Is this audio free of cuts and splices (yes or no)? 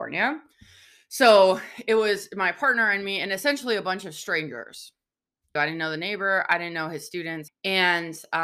no